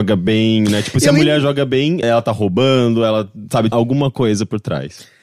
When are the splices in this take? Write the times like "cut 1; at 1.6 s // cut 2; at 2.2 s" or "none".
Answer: cut 1; at 2.0 s // cut 2; at 3.7 s